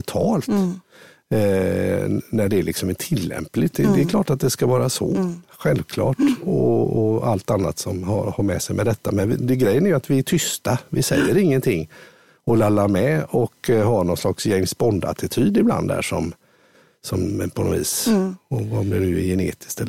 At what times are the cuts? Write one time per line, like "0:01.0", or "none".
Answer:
none